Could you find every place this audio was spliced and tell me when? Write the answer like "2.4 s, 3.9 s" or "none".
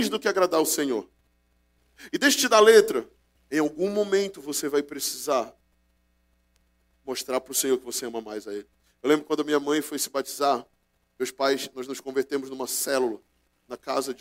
3.4 s